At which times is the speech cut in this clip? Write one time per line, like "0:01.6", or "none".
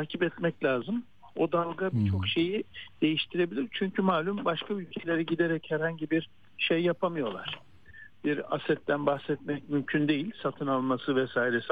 none